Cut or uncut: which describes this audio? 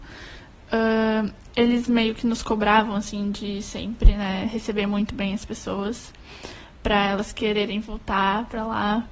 uncut